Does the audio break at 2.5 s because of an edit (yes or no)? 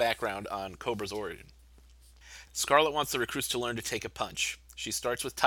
yes